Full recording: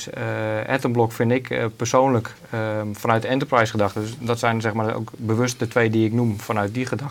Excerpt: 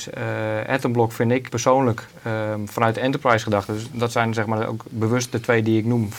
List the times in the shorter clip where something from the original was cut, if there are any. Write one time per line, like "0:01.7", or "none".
0:01.5